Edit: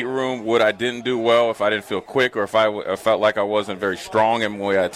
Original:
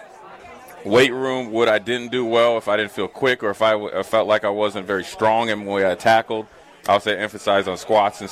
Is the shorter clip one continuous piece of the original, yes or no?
yes